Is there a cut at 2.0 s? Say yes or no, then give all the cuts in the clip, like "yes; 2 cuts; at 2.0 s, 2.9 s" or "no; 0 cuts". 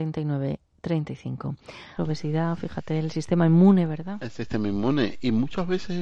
yes; 1 cut; at 2.0 s